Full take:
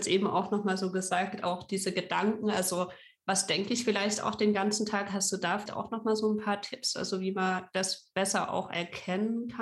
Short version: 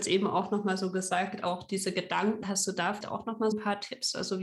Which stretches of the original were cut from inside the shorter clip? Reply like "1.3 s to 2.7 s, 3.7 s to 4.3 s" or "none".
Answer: 2.4 s to 5.1 s, 6.2 s to 6.3 s